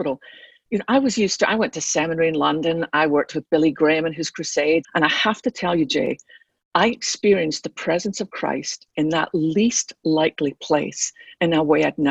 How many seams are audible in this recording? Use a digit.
1